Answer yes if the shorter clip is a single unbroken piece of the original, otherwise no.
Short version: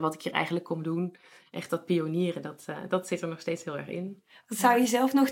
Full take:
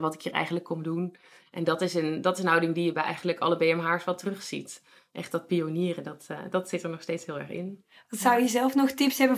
no